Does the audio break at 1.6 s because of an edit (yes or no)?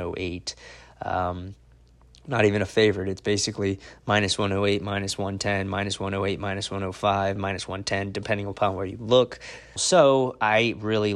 no